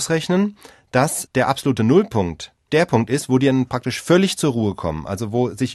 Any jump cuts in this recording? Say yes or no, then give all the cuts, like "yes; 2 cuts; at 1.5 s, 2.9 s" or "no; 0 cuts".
no; 0 cuts